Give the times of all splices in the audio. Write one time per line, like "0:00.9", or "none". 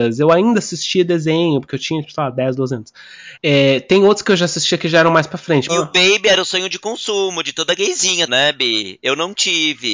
0:03.4
0:05.7
0:08.3